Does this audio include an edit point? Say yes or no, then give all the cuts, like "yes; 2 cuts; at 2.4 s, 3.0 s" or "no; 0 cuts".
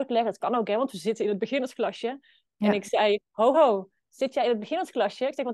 yes; 1 cut; at 3.5 s